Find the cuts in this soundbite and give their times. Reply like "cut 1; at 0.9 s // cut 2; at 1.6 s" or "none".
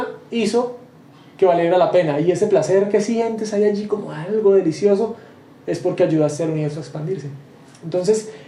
none